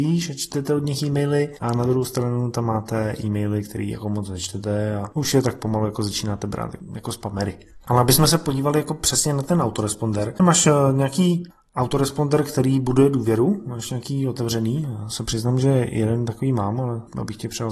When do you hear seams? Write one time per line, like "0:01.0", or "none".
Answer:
0:10.4

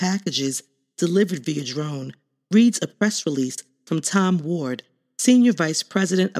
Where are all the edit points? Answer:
none

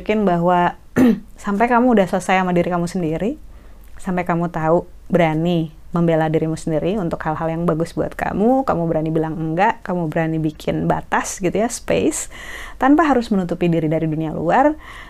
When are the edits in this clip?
none

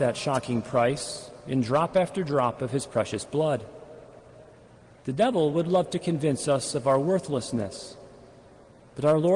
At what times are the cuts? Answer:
0:04.9

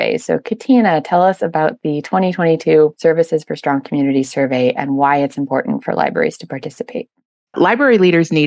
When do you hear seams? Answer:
0:07.5

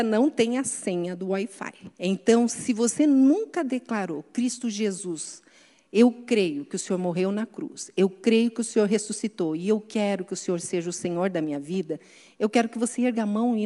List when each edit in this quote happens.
0:01.9

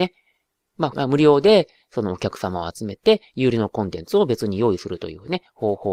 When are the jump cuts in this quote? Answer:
0:00.9

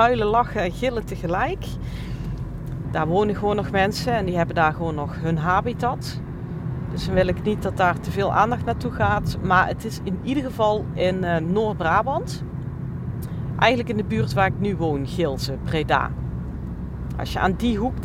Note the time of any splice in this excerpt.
0:02.8

